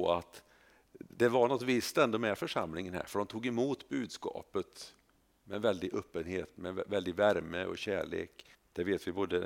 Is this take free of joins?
no; 1 cut; at 8.5 s

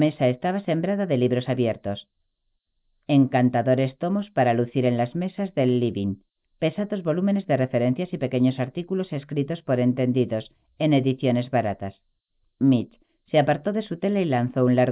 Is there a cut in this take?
yes; 1 cut; at 12.5 s

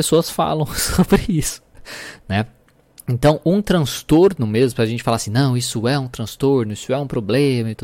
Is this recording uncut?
yes; 0 cuts

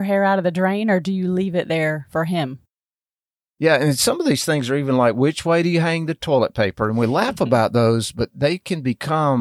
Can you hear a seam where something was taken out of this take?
no; 0 cuts

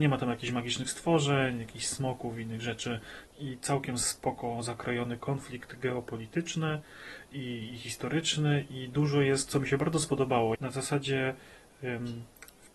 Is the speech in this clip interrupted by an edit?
yes; 3 cuts; at 3.3 s, 5.2 s, 10.5 s

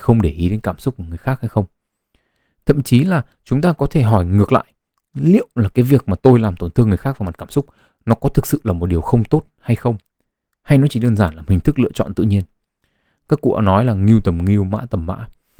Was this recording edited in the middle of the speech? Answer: no; 0 cuts

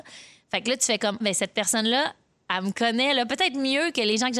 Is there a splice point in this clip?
yes; 1 cut; at 1.2 s

